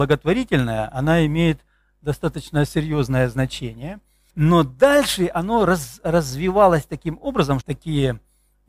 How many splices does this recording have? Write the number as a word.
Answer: two